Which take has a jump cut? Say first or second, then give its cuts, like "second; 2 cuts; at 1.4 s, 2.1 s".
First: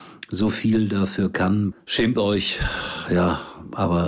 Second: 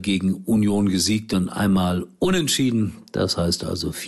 first; 1 cut; at 1.7 s